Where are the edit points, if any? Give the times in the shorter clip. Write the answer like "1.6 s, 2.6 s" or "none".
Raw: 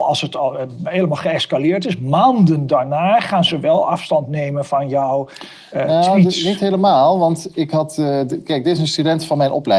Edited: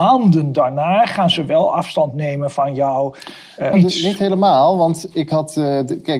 3.7 s